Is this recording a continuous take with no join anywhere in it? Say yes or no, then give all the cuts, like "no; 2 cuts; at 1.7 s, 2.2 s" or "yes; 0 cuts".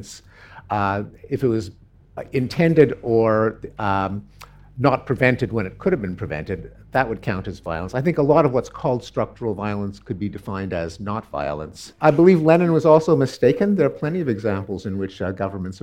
yes; 0 cuts